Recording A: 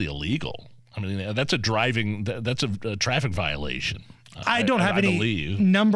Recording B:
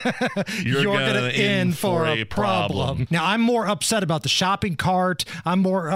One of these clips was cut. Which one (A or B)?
B